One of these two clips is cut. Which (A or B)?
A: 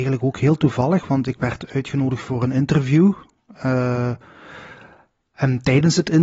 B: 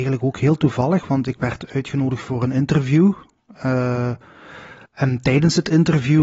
B